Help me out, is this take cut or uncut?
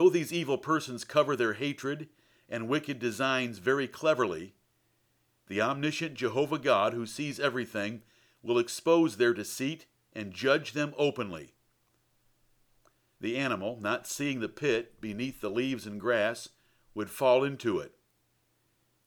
cut